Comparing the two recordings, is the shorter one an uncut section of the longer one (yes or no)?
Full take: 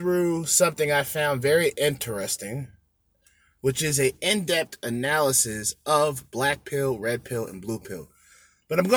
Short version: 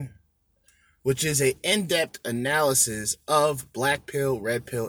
yes